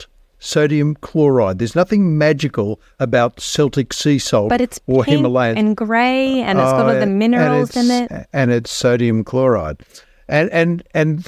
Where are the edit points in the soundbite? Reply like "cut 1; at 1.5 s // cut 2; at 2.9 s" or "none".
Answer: none